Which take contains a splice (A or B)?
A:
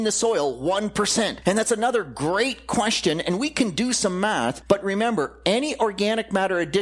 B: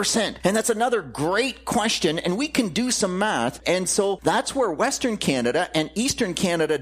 B